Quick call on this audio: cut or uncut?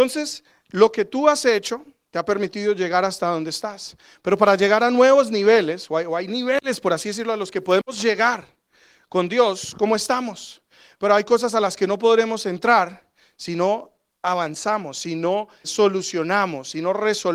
cut